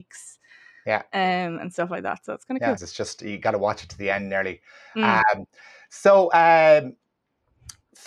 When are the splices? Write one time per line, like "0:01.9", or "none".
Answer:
0:02.8